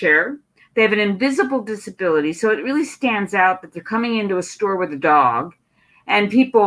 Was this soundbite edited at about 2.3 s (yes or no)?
no